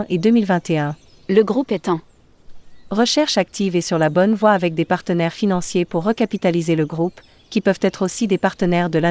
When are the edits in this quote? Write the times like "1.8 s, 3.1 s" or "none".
none